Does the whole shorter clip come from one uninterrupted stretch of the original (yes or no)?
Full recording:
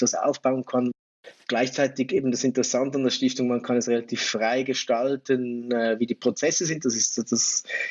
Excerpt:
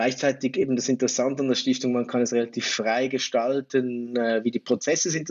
yes